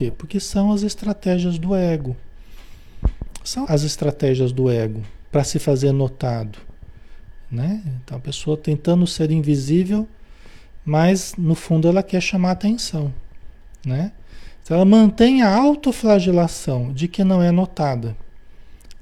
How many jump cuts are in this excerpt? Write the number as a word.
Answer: one